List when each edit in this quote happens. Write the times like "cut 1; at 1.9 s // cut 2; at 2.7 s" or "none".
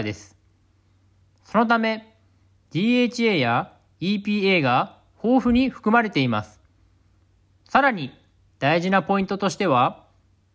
cut 1; at 2.6 s // cut 2; at 7.6 s

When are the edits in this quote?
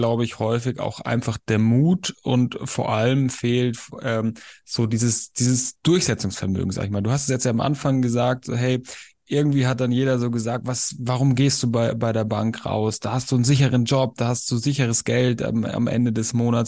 none

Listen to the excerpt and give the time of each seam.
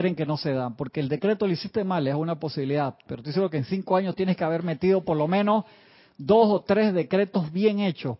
none

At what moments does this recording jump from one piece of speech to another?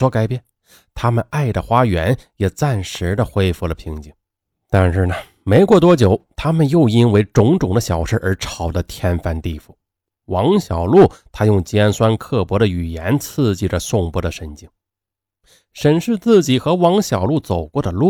none

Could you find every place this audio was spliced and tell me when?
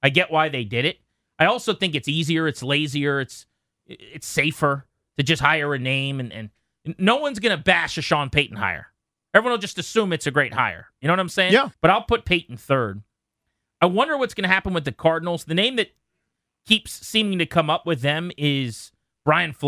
cut 1; at 11.7 s

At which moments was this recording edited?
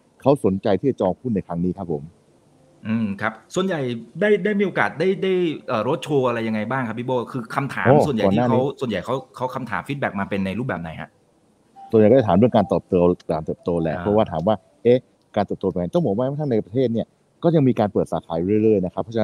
none

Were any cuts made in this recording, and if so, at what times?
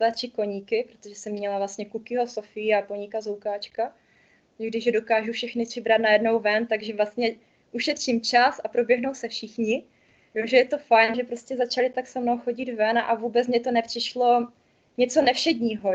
cut 1; at 11.1 s

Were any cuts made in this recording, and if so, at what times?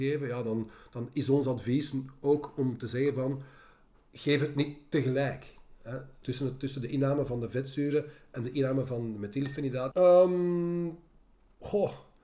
cut 1; at 6.2 s // cut 2; at 9.9 s

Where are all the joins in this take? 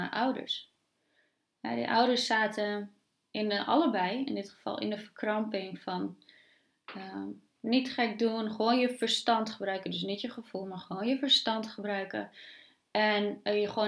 none

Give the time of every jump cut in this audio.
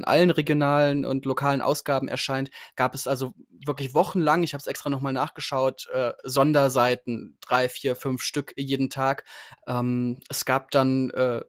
cut 1; at 9.6 s

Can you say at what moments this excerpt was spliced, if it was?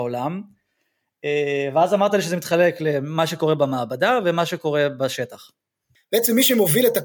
cut 1; at 6.0 s

